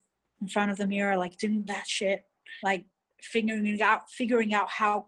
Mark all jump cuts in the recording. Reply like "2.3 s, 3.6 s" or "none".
2.6 s